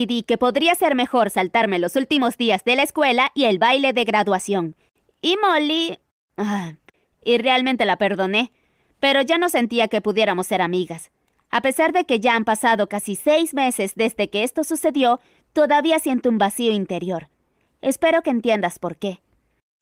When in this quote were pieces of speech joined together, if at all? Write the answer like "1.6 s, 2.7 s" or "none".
7.1 s